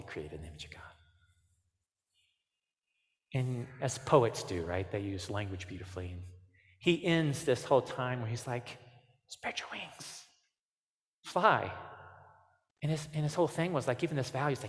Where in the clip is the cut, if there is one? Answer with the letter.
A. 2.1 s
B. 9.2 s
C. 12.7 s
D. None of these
C